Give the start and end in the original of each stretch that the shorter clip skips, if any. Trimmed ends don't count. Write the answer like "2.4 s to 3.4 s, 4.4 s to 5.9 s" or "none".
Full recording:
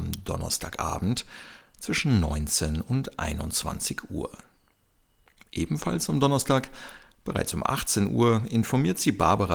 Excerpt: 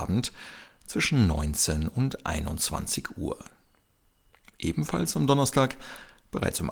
none